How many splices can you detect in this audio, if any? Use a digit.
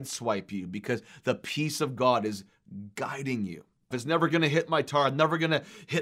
1